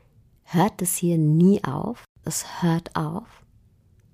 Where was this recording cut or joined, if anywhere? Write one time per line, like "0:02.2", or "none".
0:02.2